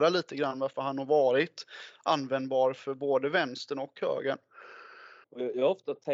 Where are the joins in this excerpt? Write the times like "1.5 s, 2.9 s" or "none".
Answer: 5.2 s